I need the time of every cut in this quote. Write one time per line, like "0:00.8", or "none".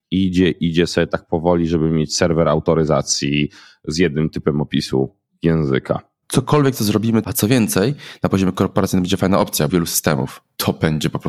0:06.2
0:07.2
0:09.7

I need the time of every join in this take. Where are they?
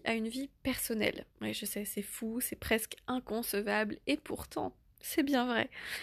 0:01.3

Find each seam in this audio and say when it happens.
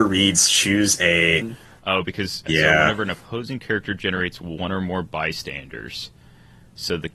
0:01.4
0:02.5

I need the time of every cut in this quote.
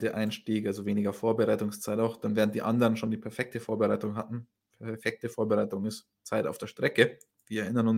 none

